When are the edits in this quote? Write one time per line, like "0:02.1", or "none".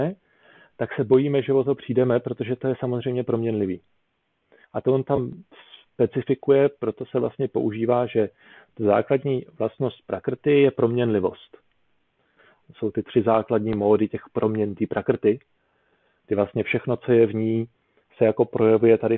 0:12.6

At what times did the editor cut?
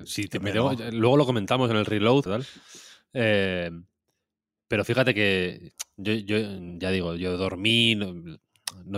0:02.3

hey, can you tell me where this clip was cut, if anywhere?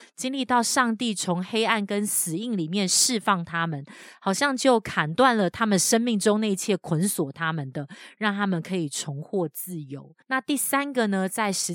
0:10.2

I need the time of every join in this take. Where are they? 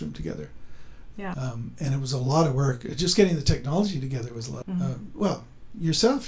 0:01.3
0:04.6

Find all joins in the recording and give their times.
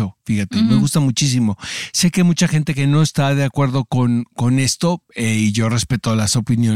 none

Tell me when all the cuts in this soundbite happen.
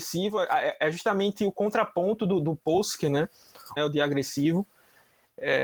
0:03.8

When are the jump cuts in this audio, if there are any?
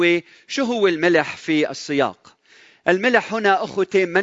none

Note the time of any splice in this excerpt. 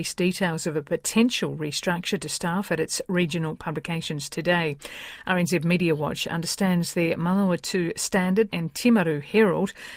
0:08.5

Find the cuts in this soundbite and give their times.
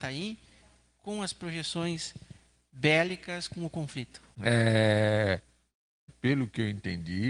0:04.3
0:06.1

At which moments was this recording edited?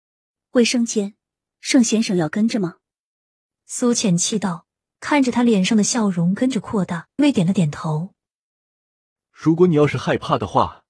0:07.2

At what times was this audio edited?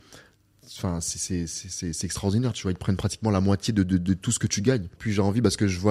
0:04.9

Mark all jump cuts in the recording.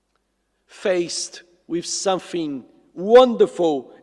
none

